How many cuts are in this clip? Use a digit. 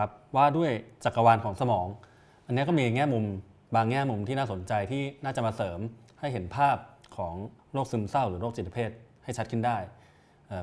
1